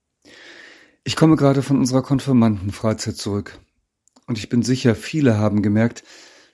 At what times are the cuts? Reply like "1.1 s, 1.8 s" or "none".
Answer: 4.2 s